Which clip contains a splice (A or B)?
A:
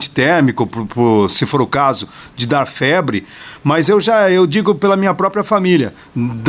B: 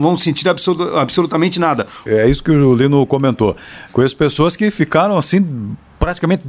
B